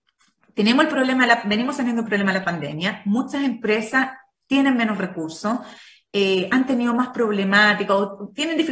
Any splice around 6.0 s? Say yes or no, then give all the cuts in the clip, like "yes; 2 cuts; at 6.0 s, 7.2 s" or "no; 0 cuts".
no; 0 cuts